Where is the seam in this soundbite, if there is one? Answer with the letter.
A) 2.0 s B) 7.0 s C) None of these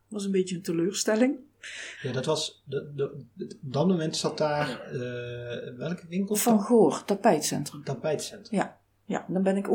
A